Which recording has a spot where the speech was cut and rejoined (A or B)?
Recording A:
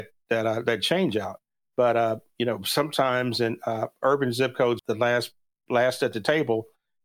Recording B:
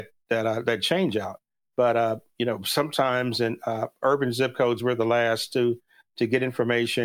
A